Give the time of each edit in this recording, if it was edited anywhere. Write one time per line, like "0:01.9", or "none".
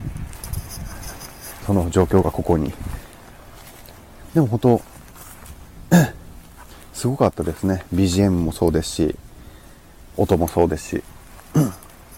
0:01.6
0:04.3